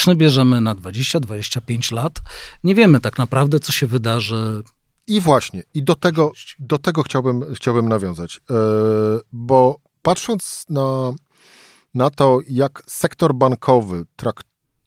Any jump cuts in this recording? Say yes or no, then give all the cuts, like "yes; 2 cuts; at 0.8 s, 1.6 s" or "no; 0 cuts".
no; 0 cuts